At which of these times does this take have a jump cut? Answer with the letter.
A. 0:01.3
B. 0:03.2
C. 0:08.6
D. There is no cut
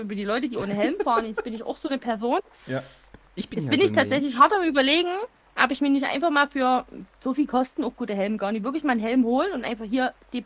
B